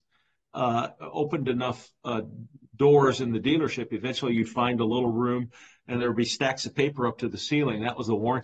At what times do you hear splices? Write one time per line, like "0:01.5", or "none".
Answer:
0:01.0